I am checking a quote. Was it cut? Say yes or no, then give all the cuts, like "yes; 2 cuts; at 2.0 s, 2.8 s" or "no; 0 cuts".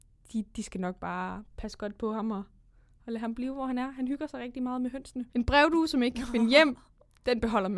yes; 1 cut; at 5.3 s